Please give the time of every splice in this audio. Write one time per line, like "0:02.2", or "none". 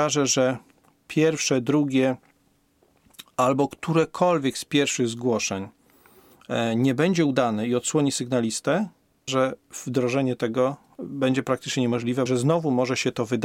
0:09.3
0:12.3